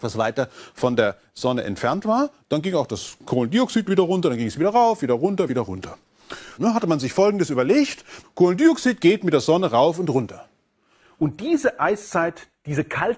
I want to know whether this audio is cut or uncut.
cut